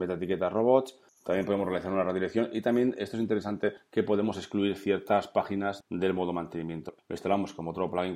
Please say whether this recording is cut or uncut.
cut